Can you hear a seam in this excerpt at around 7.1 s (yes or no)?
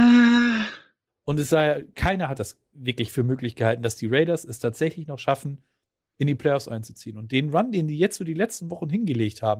no